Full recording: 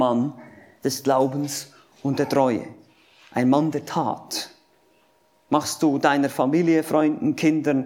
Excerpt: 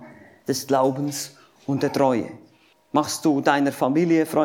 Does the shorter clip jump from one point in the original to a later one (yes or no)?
yes